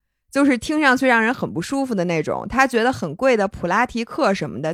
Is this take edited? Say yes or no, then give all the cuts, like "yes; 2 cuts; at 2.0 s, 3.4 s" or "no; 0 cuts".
no; 0 cuts